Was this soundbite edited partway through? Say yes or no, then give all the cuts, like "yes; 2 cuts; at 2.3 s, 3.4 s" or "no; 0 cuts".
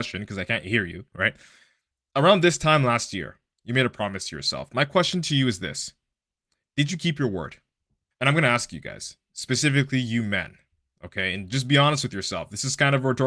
yes; 1 cut; at 8.1 s